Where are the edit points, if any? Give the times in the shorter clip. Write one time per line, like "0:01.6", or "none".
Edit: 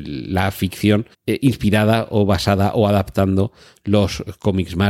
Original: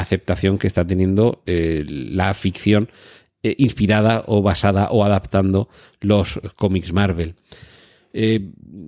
0:01.1